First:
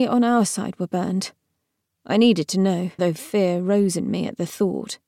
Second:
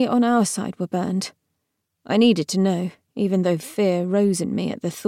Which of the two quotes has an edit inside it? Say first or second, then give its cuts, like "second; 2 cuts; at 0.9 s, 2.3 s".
first; 1 cut; at 3.0 s